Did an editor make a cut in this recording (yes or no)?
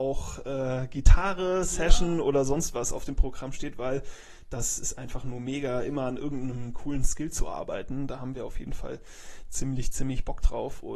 no